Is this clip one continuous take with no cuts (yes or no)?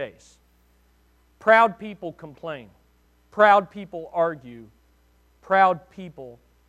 yes